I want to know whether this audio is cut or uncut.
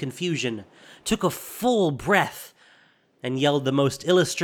uncut